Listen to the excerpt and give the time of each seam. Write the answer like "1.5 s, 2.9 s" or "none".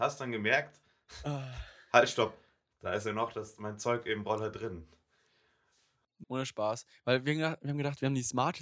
6.2 s